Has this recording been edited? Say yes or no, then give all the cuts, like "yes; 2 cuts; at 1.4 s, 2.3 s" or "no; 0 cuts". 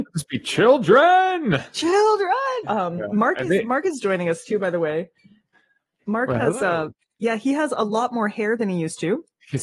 yes; 1 cut; at 2.6 s